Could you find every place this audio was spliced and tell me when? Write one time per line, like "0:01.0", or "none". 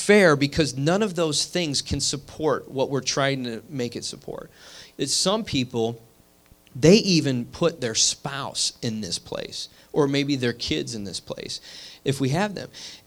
0:04.9
0:12.0

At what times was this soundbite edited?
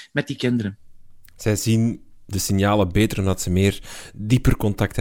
none

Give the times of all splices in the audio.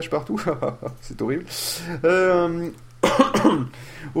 none

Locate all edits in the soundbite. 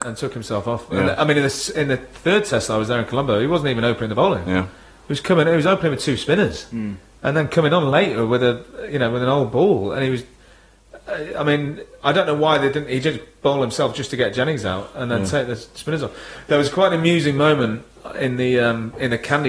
none

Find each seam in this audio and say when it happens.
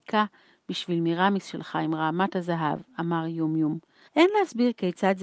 0:04.1

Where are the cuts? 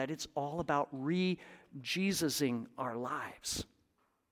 none

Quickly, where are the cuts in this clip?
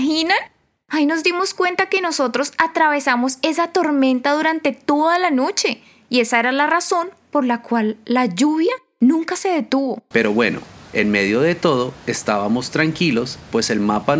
0:10.1

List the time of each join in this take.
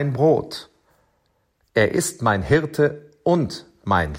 none

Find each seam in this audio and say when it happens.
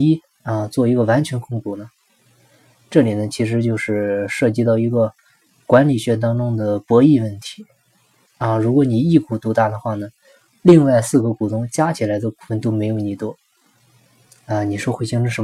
0:08.2

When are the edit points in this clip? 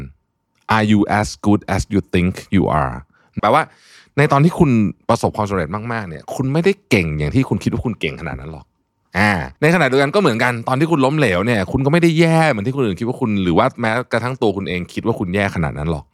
0:03.4
0:09.6

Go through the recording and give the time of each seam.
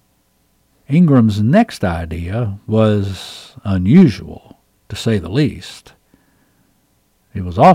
none

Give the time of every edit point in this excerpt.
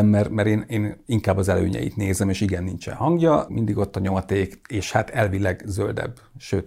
0:03.5

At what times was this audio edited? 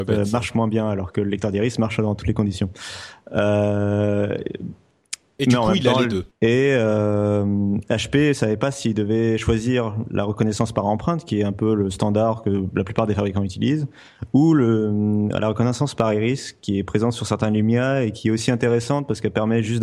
0:06.3

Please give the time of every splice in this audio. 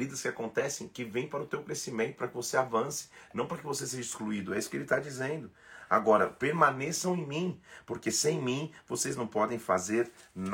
none

